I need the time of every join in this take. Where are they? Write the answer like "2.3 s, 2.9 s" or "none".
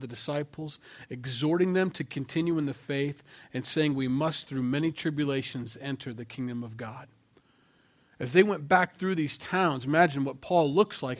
none